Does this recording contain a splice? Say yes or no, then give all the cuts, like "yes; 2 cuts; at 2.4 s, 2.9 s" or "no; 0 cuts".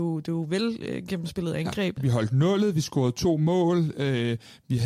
yes; 1 cut; at 2.0 s